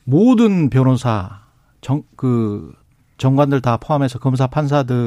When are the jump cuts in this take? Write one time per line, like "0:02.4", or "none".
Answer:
none